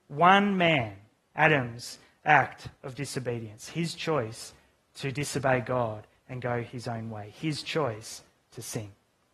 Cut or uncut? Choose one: uncut